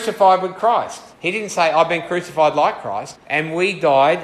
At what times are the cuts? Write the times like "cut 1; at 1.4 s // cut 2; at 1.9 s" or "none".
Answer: cut 1; at 1.1 s // cut 2; at 3.1 s